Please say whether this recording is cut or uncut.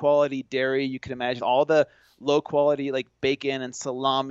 cut